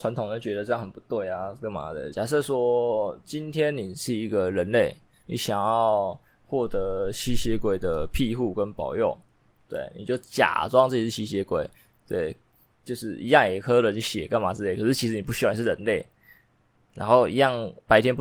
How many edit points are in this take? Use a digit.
1